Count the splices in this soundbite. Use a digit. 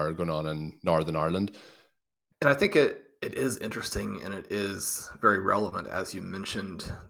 1